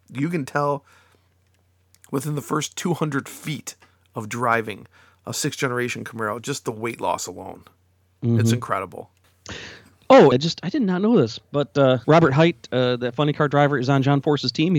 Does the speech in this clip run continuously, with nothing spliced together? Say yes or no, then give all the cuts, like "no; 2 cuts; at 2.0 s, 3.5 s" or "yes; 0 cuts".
no; 2 cuts; at 10.3 s, 12.0 s